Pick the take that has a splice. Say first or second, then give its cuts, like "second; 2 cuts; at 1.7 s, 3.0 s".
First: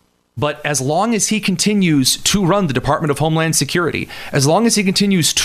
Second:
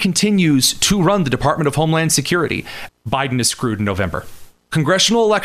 second; 1 cut; at 2.9 s